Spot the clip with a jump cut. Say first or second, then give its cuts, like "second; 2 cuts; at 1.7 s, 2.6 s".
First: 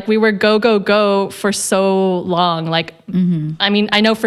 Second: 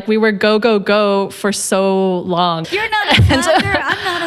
second; 1 cut; at 2.6 s